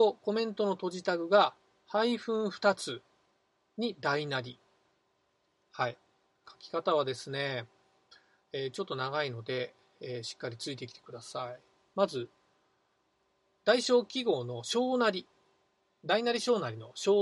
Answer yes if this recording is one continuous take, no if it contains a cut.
no